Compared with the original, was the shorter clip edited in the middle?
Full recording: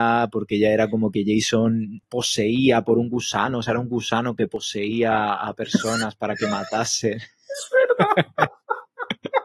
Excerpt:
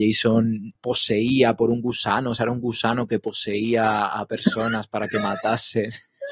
no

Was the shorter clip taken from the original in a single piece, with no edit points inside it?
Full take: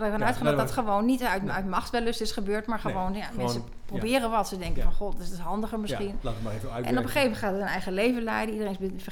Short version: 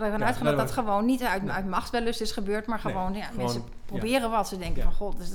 yes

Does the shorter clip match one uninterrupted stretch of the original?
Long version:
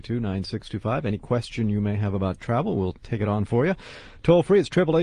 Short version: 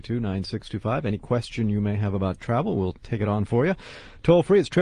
yes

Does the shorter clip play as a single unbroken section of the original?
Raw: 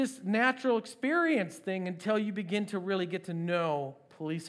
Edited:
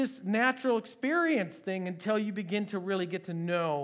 yes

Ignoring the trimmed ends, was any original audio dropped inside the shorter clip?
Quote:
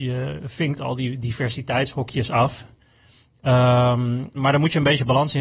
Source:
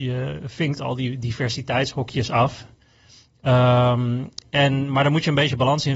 yes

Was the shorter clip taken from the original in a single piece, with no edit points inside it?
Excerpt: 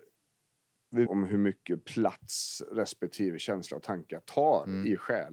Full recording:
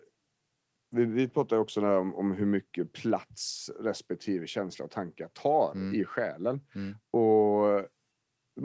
no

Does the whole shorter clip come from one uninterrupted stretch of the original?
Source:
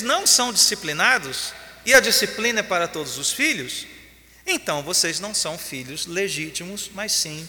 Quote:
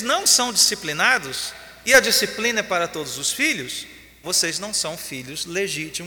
no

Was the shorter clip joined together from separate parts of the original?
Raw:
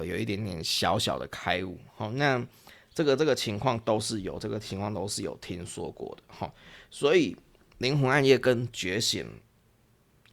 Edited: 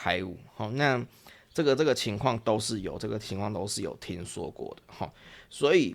no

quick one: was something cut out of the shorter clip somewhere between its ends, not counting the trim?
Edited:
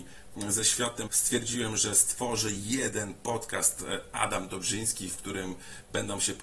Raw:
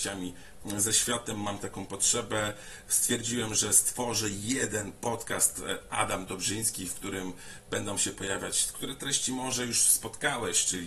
yes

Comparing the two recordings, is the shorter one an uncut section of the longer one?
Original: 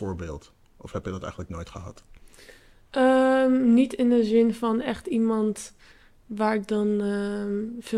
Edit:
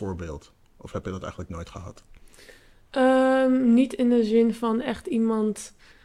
yes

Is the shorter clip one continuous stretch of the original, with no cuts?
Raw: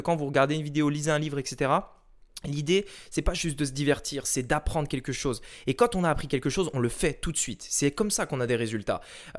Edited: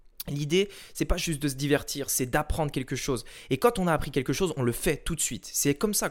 yes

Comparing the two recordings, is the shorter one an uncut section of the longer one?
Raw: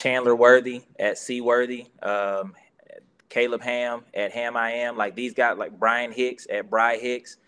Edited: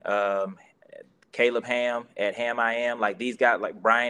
yes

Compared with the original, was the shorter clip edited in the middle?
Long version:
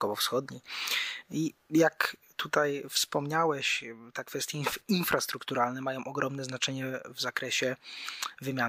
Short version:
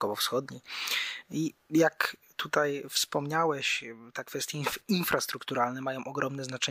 no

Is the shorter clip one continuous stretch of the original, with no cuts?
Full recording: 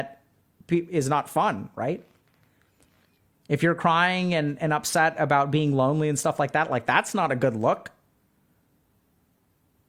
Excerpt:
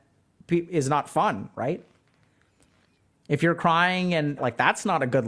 no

